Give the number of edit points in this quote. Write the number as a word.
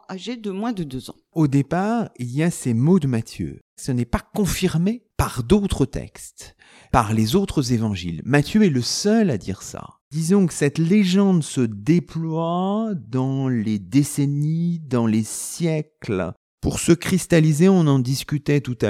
zero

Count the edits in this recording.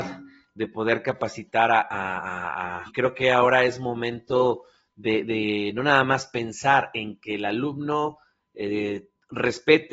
one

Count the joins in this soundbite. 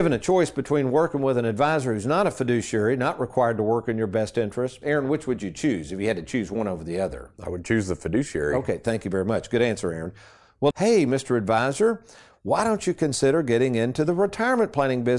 two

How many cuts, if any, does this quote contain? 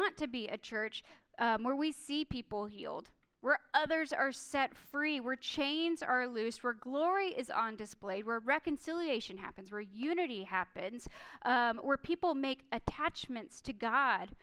zero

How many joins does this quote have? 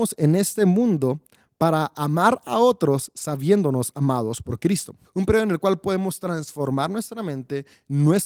one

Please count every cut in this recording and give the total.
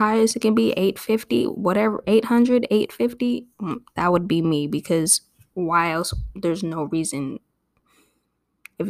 zero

